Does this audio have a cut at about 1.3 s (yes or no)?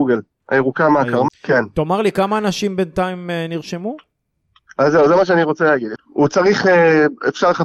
yes